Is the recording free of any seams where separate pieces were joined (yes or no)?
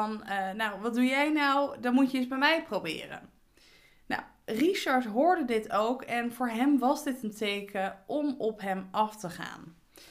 yes